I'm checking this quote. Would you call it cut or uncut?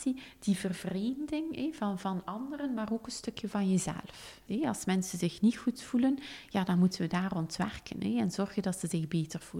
cut